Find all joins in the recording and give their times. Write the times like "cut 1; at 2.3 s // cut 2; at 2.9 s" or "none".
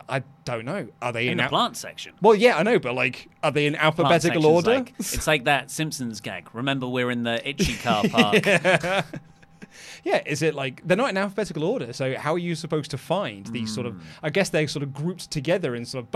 none

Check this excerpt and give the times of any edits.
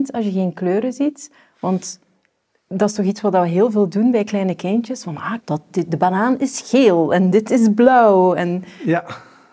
cut 1; at 5.4 s

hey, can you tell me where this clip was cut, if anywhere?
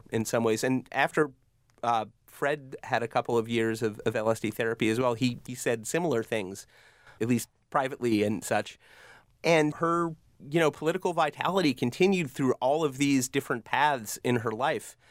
none

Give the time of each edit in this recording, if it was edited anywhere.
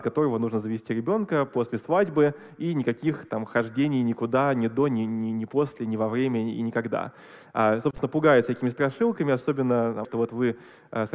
cut 1; at 10.0 s

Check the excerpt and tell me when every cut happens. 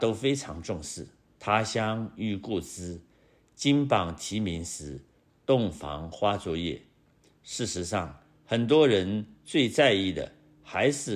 cut 1; at 1.2 s

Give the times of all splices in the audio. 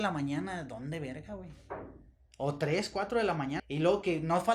cut 1; at 3.6 s

